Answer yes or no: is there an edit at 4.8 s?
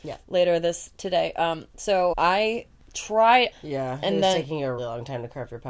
yes